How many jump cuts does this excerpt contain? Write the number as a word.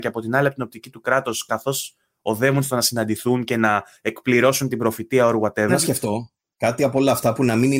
one